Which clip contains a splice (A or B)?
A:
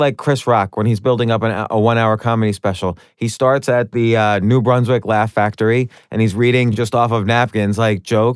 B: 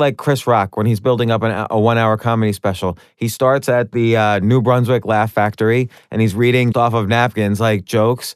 B